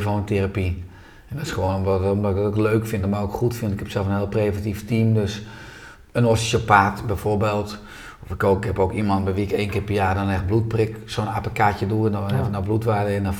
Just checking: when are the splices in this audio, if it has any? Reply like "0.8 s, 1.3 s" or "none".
none